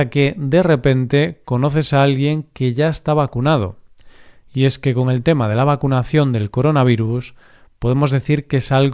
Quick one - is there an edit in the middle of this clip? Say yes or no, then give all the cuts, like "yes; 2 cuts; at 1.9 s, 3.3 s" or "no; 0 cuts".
no; 0 cuts